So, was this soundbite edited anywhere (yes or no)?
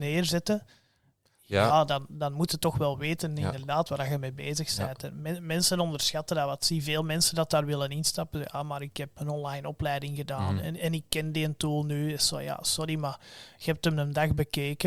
yes